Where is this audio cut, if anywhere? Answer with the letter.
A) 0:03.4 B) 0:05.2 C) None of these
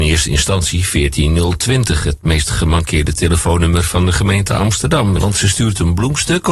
B